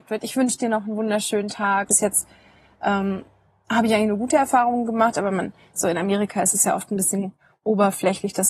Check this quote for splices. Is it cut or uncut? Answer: cut